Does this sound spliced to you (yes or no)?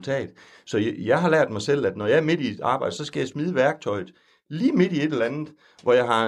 no